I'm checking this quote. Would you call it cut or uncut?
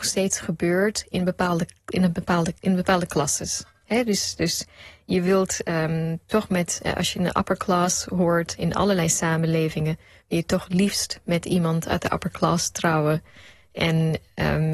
uncut